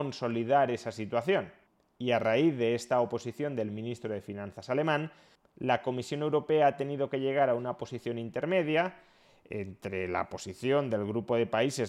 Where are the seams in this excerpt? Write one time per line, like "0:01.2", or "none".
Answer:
none